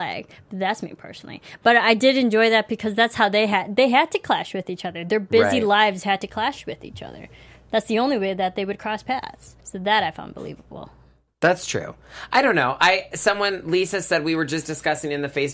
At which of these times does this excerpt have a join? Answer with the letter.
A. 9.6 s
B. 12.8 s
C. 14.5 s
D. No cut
A